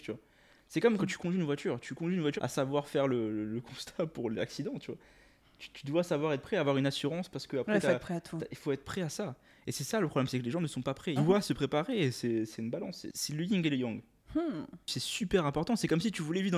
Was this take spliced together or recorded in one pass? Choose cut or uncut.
cut